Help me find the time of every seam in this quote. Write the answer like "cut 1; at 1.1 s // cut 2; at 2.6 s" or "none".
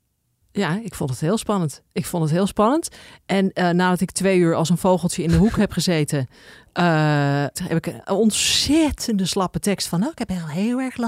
cut 1; at 7.5 s